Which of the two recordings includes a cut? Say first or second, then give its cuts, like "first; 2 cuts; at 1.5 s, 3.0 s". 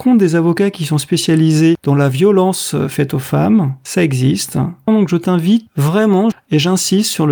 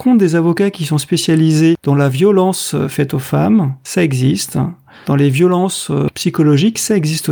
first; 2 cuts; at 4.9 s, 6.3 s